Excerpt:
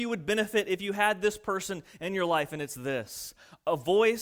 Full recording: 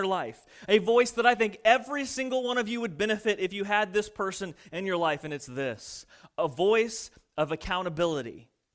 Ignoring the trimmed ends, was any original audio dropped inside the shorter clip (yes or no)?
no